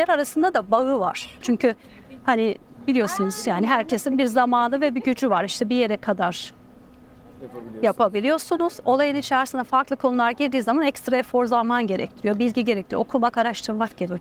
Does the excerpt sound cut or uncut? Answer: cut